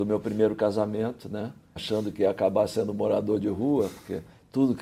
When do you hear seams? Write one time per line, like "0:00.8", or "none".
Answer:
0:01.8